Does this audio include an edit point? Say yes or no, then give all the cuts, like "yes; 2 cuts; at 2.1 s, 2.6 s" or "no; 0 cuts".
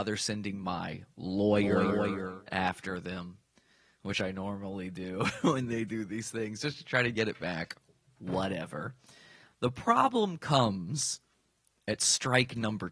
no; 0 cuts